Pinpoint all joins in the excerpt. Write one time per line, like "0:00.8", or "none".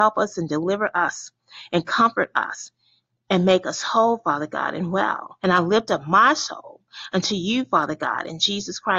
0:05.4